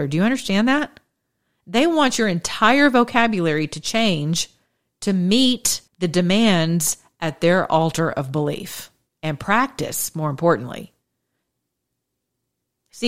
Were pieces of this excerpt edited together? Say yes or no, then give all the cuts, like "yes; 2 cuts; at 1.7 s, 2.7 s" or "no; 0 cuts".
yes; 1 cut; at 5.9 s